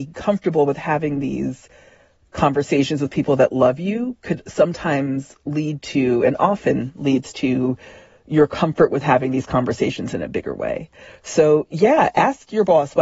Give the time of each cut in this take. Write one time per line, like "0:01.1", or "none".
none